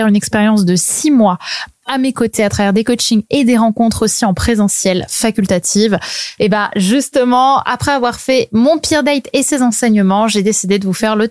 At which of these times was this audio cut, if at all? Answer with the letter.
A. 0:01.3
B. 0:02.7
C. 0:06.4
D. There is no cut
C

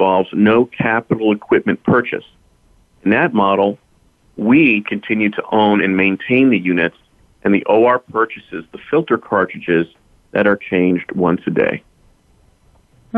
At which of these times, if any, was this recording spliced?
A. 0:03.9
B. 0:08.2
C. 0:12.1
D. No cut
D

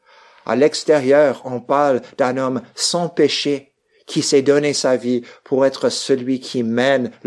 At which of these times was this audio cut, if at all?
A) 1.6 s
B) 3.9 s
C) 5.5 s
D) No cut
D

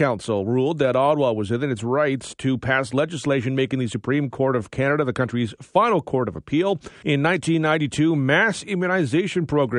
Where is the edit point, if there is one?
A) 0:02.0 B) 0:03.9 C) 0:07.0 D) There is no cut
C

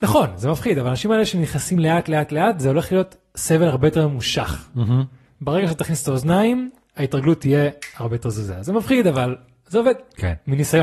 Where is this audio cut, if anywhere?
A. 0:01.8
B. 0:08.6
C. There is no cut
C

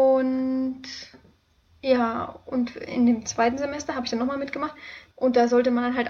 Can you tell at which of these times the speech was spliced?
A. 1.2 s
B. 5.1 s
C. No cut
B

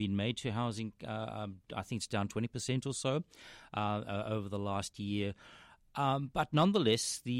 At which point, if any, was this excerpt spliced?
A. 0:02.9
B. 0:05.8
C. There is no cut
C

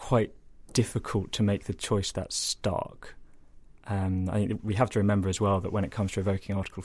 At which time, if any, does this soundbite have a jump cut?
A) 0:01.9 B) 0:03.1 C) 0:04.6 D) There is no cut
D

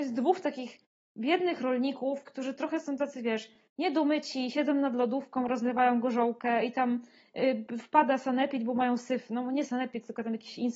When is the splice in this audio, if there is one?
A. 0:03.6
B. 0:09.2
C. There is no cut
C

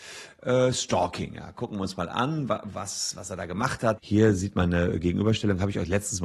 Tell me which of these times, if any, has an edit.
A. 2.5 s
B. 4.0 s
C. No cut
B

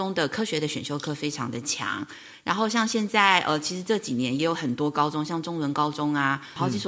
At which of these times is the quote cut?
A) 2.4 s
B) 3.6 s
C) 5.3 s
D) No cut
D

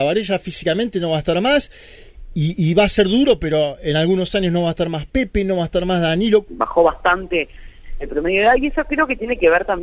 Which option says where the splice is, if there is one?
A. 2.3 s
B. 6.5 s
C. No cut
B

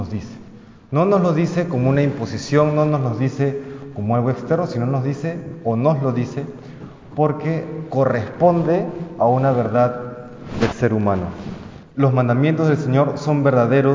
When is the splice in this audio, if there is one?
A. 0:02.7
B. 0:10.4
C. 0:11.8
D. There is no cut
C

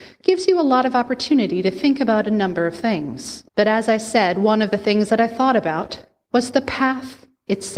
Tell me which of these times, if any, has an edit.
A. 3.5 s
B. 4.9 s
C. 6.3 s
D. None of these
A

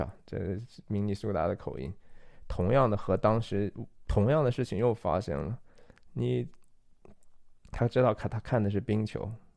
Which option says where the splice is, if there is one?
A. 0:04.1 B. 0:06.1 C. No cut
A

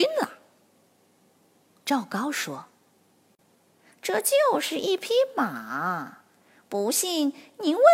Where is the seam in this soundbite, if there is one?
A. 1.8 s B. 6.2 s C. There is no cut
C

